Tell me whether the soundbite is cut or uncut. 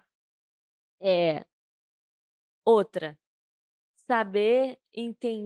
uncut